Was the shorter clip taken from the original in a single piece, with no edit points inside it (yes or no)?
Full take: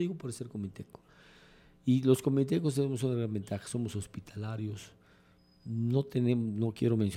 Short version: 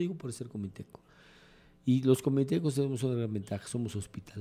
yes